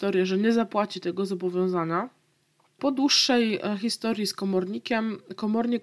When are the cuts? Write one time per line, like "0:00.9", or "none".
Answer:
0:02.8